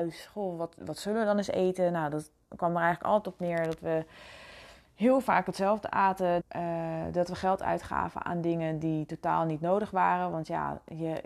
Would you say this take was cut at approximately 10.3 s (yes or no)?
no